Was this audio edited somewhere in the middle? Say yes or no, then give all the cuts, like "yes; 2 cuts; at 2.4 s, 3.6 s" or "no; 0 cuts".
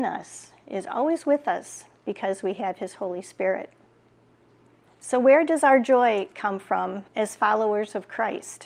yes; 2 cuts; at 4.9 s, 7.1 s